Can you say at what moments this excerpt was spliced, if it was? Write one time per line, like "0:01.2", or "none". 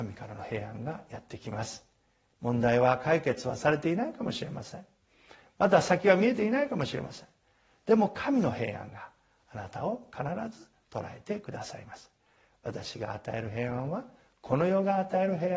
none